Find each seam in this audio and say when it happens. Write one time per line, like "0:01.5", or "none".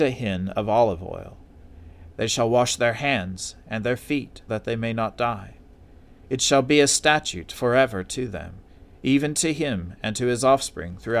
0:02.1
0:04.5